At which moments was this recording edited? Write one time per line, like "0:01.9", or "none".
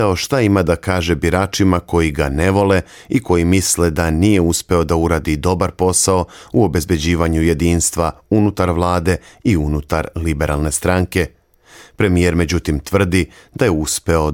none